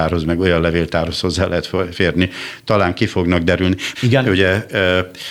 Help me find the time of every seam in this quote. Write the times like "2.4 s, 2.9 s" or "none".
3.9 s